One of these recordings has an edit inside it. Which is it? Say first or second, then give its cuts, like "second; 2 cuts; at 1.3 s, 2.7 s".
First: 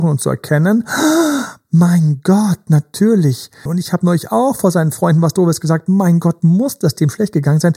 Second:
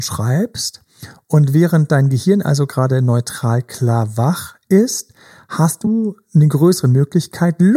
first; 1 cut; at 3.7 s